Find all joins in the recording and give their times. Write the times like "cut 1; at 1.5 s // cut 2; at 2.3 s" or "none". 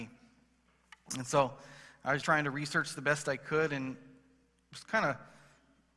cut 1; at 2.2 s

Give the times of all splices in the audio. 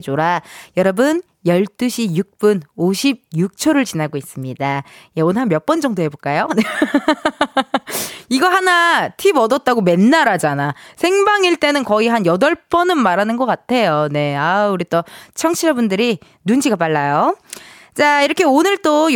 none

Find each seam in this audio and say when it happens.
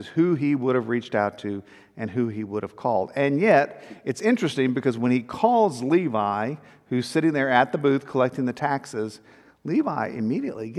none

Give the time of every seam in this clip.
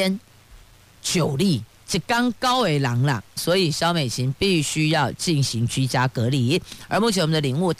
cut 1; at 3.4 s

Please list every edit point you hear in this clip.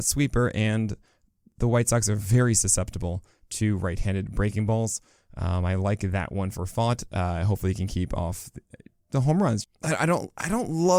cut 1; at 9.6 s

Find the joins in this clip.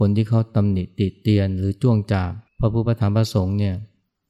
cut 1; at 2.5 s

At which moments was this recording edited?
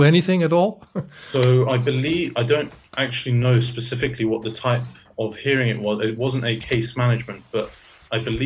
none

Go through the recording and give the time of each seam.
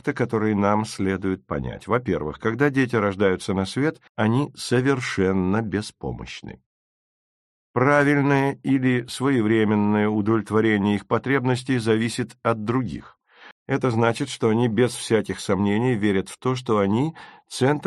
cut 1; at 4.1 s // cut 2; at 13.5 s

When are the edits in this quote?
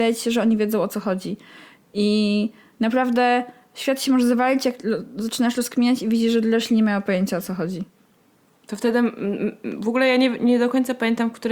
none

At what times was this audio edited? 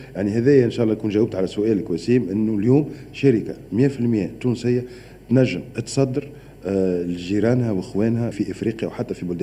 cut 1; at 8.3 s

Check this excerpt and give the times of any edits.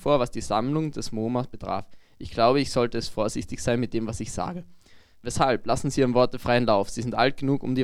none

